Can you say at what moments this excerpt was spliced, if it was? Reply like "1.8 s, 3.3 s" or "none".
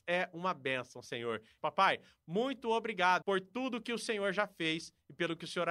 1.6 s, 3.2 s